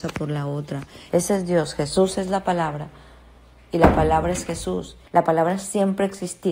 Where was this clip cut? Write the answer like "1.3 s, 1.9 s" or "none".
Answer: 1.1 s, 5.0 s